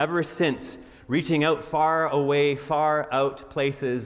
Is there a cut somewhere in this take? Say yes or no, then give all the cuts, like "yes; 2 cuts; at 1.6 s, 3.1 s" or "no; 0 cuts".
no; 0 cuts